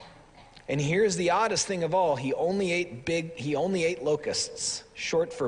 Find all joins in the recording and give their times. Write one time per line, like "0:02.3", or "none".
none

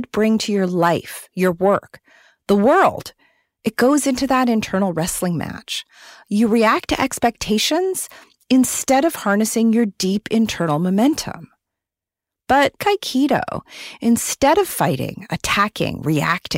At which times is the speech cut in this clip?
0:12.8

